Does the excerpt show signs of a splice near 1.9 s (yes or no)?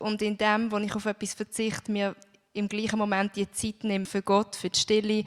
no